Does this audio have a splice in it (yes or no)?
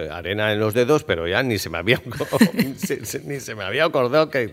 no